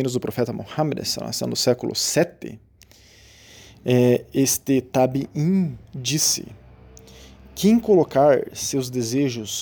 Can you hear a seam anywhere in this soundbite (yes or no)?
no